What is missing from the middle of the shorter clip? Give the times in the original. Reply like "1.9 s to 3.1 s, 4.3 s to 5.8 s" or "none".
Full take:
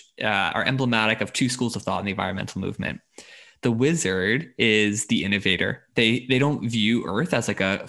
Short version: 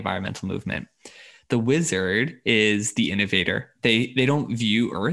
none